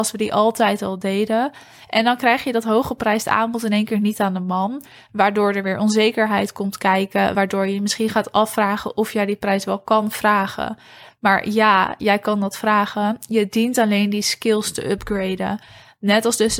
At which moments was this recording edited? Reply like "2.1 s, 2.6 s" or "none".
none